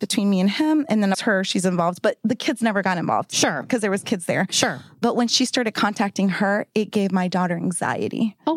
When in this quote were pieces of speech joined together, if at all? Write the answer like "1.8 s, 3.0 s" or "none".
1.1 s